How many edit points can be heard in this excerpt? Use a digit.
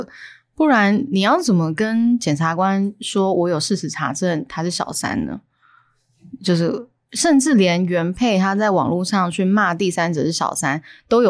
0